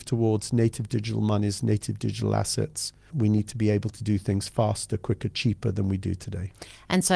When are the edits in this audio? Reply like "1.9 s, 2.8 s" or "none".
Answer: 3.1 s